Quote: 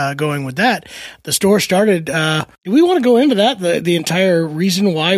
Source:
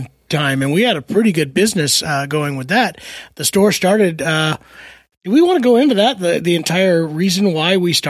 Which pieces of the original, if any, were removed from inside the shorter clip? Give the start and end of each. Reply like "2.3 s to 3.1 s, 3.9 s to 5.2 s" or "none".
4.7 s to 5.1 s